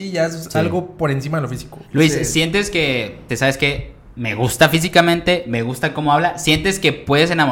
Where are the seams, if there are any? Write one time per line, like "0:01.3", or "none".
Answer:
0:03.3